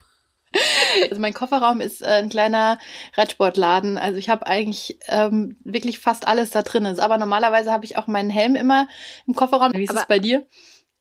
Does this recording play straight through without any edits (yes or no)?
no